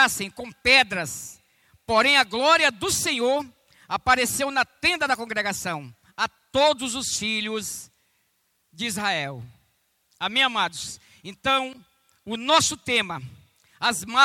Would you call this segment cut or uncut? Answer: uncut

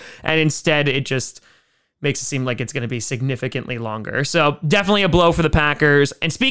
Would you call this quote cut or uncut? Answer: uncut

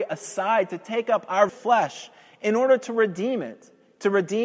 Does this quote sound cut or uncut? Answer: cut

